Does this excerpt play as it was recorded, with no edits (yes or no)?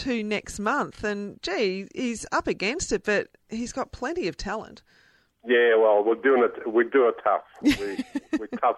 yes